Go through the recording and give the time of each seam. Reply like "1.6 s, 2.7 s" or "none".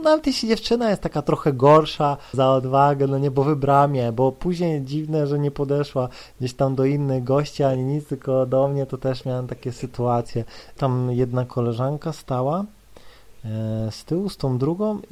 2.3 s, 10.8 s

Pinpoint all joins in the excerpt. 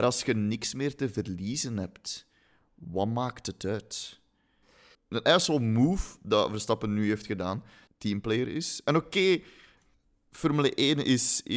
4.9 s, 7.9 s

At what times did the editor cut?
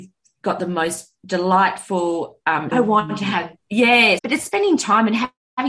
2.7 s, 4.2 s

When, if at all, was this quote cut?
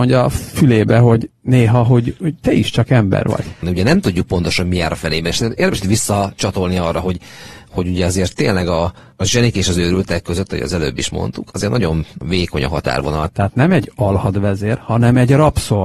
3.6 s, 13.3 s

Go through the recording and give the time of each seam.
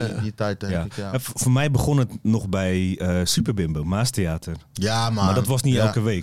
none

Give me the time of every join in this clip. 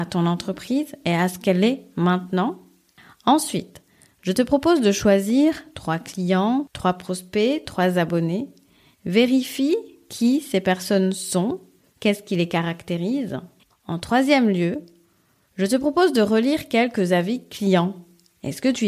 none

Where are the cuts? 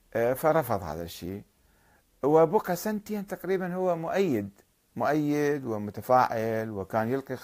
none

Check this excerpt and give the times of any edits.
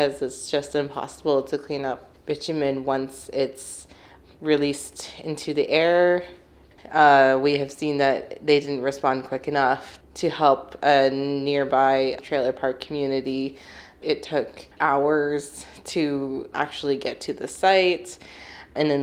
none

